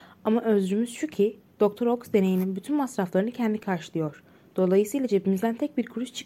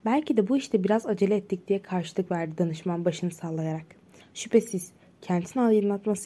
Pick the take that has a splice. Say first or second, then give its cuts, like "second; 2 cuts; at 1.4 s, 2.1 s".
second; 1 cut; at 4.2 s